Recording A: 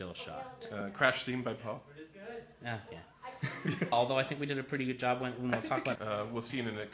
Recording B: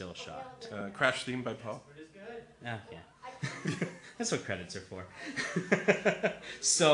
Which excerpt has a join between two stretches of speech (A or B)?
A